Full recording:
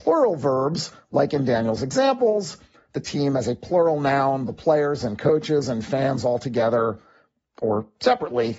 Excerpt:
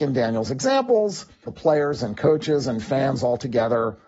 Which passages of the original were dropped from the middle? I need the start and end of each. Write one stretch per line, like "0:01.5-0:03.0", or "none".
0:02.8-0:04.5